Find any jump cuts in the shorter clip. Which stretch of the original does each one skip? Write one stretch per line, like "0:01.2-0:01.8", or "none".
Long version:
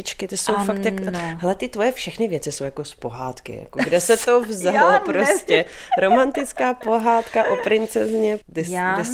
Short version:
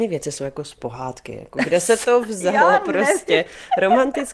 none